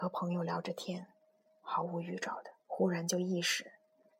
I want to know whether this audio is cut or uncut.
cut